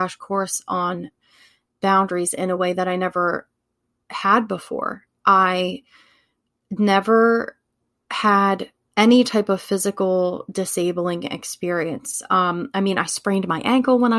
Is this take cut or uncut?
uncut